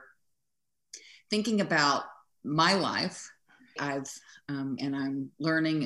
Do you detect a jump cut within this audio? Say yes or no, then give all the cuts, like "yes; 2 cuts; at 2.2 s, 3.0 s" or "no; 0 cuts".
yes; 2 cuts; at 3.8 s, 4.8 s